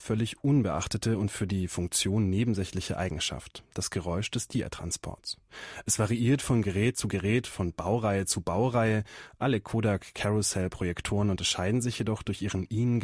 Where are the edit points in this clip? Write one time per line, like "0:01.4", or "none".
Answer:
none